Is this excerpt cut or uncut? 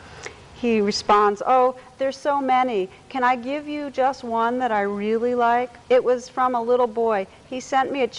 cut